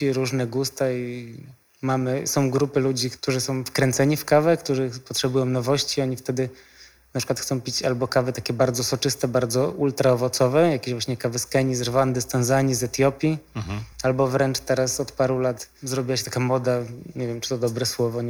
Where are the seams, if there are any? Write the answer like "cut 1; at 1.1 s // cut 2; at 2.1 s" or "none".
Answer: none